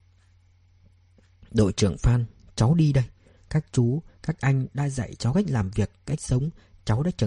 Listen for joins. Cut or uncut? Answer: cut